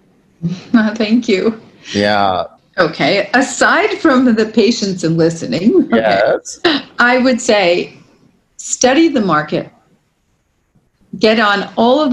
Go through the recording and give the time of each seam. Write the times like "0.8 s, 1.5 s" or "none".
2.6 s

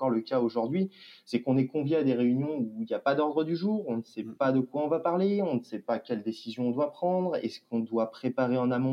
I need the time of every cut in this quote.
none

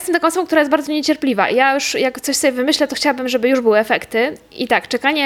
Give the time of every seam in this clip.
none

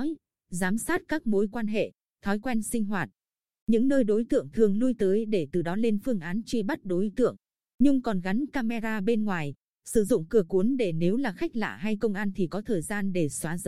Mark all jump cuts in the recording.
7.6 s

